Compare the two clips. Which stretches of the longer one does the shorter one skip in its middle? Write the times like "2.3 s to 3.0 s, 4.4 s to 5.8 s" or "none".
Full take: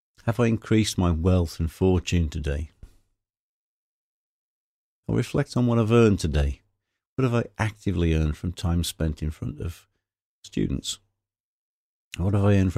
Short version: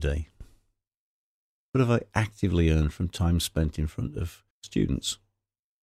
4.1 s to 7.1 s, 9.9 s to 10.3 s